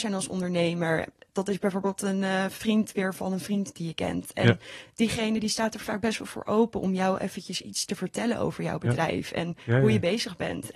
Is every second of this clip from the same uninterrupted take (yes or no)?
yes